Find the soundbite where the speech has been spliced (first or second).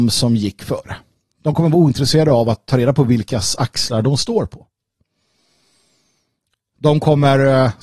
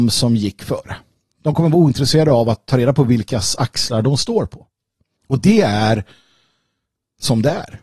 second